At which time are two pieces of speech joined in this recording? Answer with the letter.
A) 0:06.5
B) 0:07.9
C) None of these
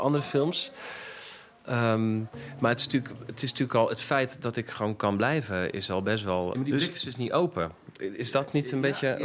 A